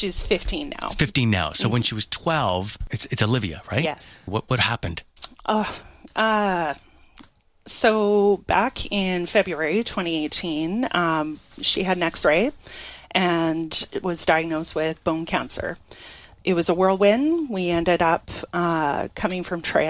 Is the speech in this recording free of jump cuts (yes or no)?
no